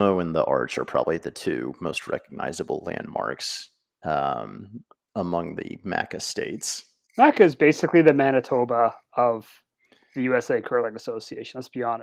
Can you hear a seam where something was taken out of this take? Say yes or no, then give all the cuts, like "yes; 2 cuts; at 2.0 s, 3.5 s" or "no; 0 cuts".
yes; 1 cut; at 7.1 s